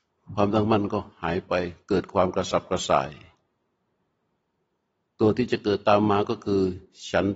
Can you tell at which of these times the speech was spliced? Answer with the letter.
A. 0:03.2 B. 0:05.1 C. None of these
C